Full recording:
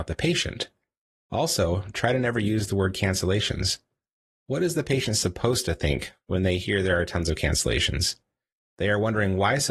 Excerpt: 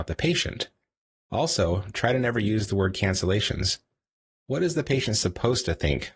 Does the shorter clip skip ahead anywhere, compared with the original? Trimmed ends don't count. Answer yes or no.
no